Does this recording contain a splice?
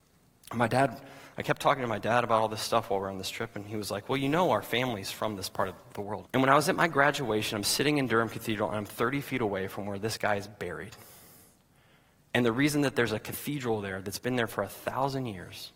yes; 1 cut; at 6.2 s

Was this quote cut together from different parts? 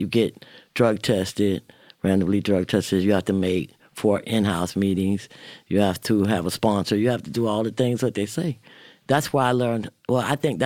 no; 0 cuts

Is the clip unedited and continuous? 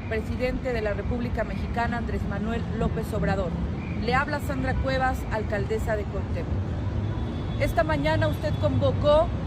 yes; 0 cuts

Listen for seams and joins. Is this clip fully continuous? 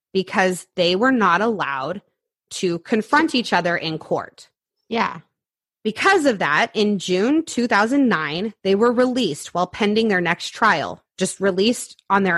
yes; 0 cuts

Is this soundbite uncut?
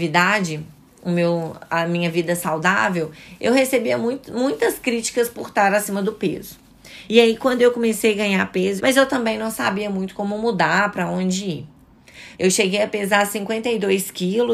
no; 3 cuts; at 7.1 s, 8.8 s, 12.3 s

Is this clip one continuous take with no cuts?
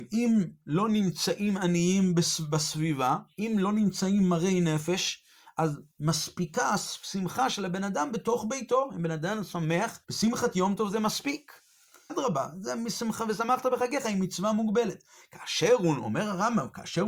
no; 2 cuts; at 10.0 s, 12.1 s

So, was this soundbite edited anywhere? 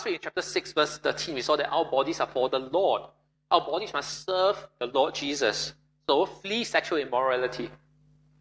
no; 0 cuts

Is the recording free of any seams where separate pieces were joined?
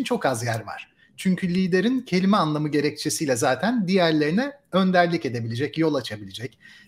yes; 0 cuts

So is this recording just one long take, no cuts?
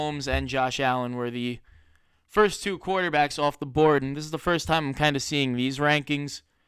yes; 0 cuts

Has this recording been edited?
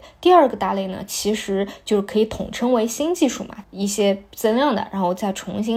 yes; 1 cut; at 3.6 s

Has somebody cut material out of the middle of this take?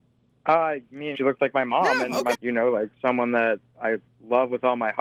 yes; 2 cuts; at 1.1 s, 2.3 s

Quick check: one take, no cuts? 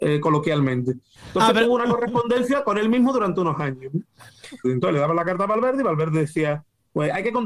no; 2 cuts; at 1.2 s, 4.6 s

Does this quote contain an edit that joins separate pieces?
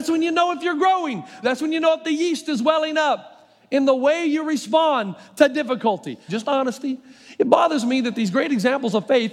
yes; 2 cuts; at 1.4 s, 6.3 s

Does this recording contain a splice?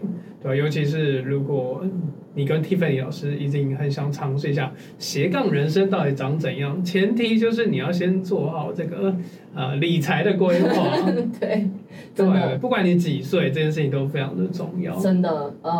no; 0 cuts

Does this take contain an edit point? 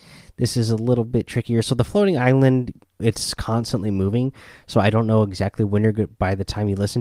yes; 1 cut; at 3.0 s

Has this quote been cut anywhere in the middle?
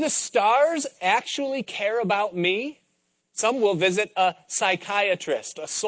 yes; 1 cut; at 3.2 s

